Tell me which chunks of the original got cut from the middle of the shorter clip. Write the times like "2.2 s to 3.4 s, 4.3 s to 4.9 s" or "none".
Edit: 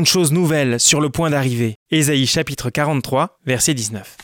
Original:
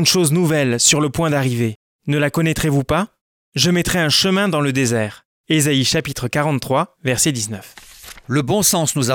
1.8 s to 5.4 s